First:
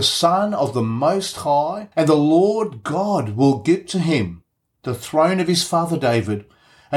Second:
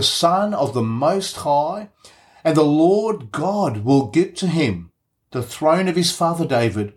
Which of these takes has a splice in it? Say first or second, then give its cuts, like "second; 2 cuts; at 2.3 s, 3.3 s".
first; 1 cut; at 1.9 s